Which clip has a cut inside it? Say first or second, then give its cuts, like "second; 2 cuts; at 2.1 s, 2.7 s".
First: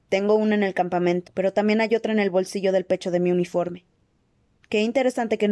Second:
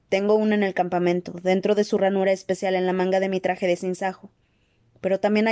first; 1 cut; at 1.2 s